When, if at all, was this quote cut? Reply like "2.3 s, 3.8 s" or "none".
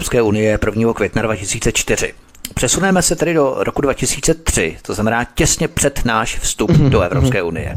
none